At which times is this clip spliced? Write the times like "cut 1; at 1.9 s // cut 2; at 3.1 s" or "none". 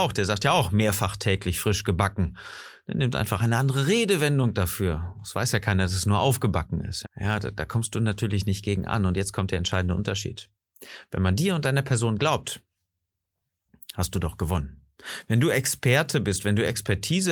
cut 1; at 7.0 s